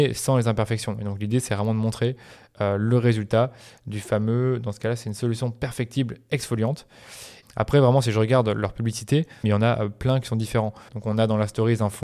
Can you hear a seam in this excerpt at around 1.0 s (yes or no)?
no